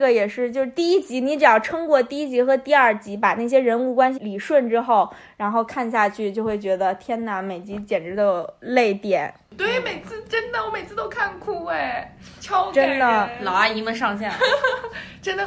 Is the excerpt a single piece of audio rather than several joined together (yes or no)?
no